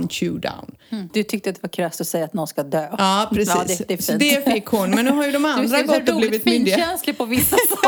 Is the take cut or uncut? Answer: cut